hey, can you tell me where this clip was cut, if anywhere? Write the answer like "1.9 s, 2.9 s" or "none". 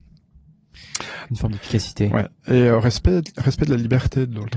1.3 s